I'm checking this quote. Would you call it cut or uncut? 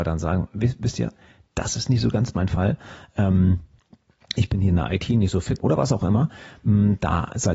cut